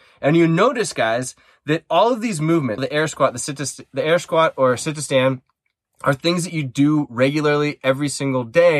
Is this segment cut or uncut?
cut